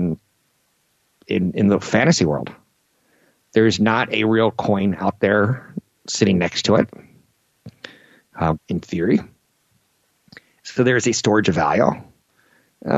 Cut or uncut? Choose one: cut